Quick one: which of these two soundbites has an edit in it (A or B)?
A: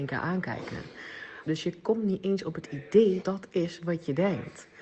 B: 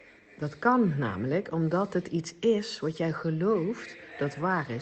A